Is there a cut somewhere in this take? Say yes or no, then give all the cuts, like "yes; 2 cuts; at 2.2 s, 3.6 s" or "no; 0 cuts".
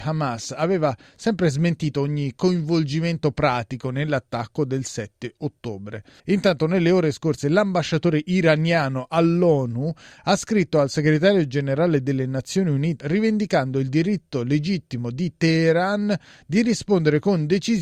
yes; 2 cuts; at 6.2 s, 13.0 s